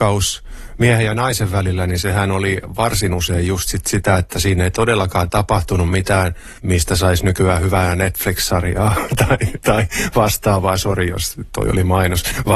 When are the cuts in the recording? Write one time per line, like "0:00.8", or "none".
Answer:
none